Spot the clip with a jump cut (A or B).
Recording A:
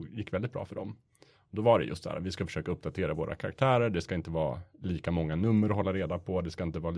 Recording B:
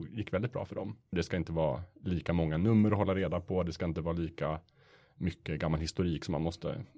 B